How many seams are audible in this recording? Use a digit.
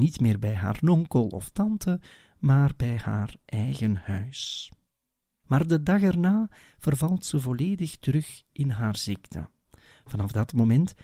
1